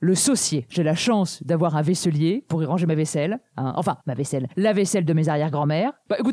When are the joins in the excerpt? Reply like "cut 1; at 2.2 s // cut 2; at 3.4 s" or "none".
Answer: none